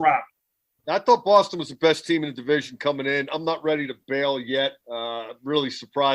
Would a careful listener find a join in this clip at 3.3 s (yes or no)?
no